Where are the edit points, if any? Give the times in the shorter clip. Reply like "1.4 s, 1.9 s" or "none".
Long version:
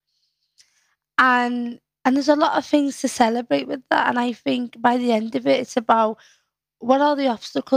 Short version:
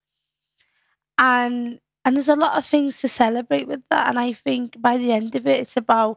none